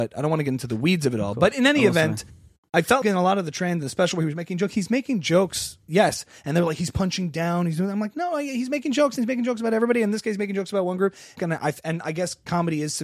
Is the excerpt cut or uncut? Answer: cut